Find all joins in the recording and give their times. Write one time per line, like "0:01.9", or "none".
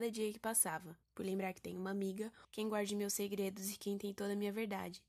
0:01.0
0:02.4